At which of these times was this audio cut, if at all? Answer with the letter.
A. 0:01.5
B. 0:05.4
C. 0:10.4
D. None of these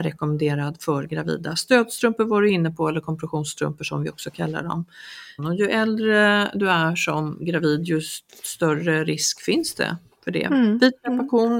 B